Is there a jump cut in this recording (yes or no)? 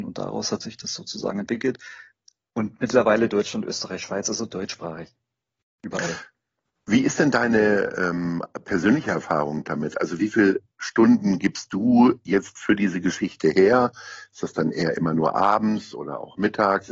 no